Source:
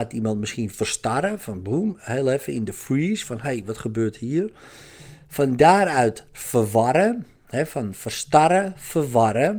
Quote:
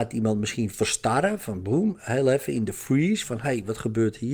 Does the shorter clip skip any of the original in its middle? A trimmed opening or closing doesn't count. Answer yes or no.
no